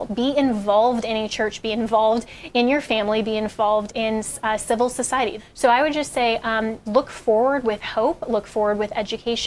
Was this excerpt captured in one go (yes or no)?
no